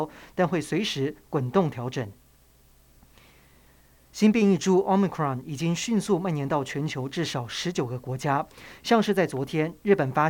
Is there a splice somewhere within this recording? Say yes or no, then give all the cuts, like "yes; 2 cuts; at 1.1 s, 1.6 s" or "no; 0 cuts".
no; 0 cuts